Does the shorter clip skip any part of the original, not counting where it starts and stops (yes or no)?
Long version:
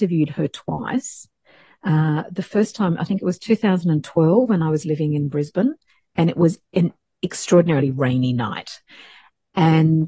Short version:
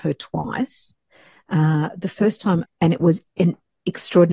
yes